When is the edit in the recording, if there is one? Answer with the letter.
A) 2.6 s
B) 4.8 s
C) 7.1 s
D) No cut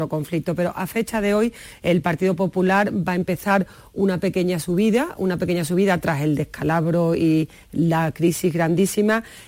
D